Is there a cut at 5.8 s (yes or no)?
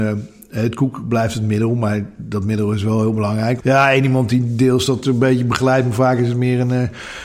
no